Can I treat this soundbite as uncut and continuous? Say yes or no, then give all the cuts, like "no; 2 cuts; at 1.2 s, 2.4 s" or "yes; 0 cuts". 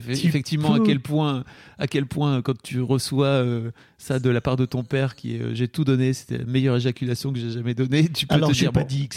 yes; 0 cuts